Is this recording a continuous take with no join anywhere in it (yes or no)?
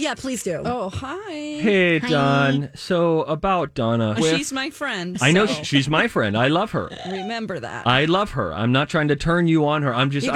no